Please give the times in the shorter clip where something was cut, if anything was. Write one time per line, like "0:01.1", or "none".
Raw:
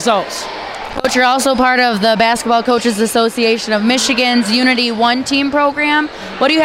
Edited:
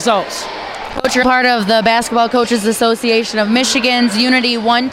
0:01.2